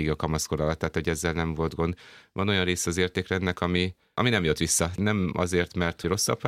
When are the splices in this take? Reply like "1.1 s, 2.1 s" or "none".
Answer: none